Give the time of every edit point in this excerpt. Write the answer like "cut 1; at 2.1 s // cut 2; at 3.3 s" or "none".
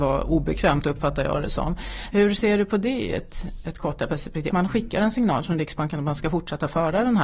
cut 1; at 2.1 s // cut 2; at 4.5 s